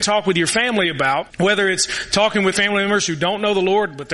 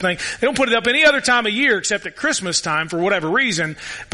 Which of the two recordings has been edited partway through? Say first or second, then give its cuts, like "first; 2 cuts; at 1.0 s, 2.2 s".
first; 2 cuts; at 1.3 s, 2.5 s